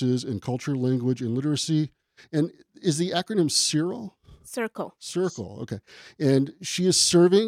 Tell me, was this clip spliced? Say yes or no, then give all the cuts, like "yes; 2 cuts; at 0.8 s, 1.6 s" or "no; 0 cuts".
no; 0 cuts